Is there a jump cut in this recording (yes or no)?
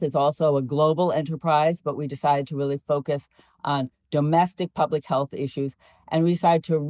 no